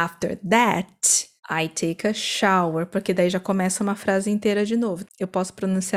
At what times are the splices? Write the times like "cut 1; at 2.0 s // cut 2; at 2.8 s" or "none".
cut 1; at 1.4 s // cut 2; at 5.0 s